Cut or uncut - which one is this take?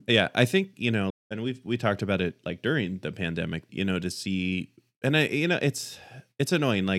cut